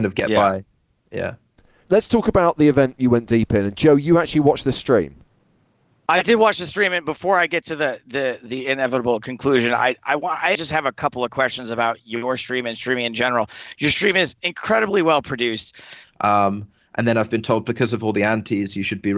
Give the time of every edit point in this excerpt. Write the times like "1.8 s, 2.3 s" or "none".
10.5 s, 16.0 s